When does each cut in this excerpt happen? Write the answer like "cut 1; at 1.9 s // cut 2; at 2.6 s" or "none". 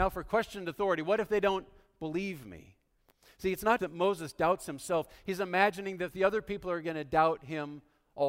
cut 1; at 3.8 s